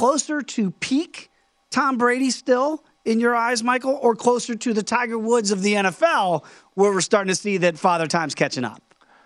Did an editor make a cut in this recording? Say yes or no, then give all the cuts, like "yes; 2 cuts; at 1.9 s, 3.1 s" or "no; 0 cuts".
no; 0 cuts